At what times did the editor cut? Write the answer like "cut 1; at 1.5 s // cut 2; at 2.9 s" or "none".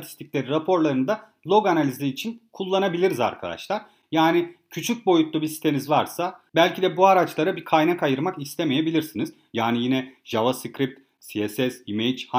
cut 1; at 9.5 s // cut 2; at 11.2 s